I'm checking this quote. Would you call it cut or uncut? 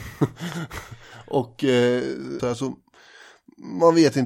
cut